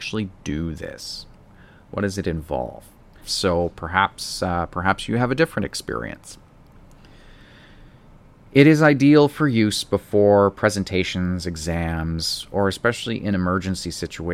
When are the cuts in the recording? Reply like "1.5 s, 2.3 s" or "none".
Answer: 3.2 s